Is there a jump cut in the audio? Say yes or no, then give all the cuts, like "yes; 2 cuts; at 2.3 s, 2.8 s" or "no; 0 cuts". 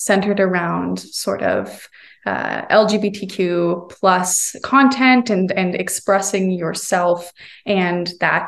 no; 0 cuts